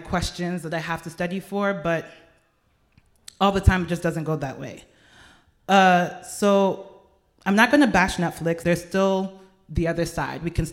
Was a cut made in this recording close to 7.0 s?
no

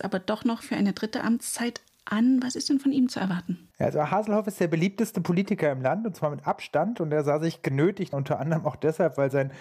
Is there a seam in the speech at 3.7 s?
yes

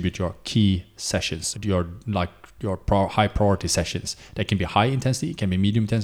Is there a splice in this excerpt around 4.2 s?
no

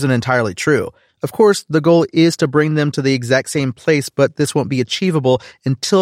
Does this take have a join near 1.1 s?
yes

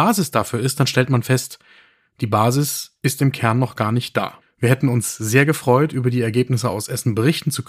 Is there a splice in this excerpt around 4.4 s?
yes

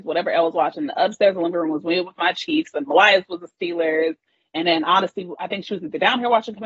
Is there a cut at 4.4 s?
no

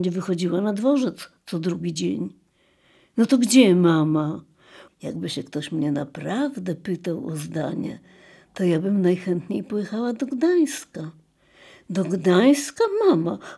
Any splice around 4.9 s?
yes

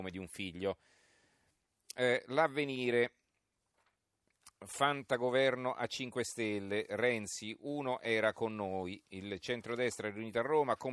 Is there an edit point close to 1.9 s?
no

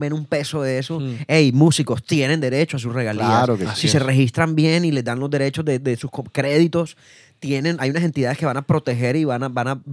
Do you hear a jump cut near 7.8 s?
no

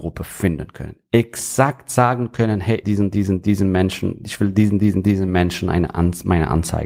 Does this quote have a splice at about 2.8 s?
yes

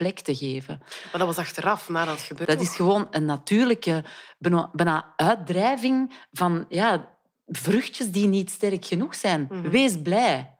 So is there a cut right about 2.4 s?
yes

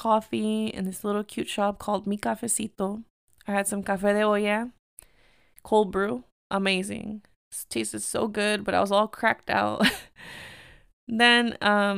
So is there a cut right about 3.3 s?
no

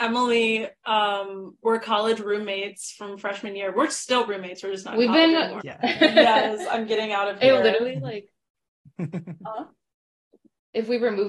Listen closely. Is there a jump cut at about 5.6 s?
yes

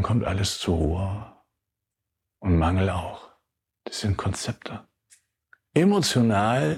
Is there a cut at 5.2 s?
no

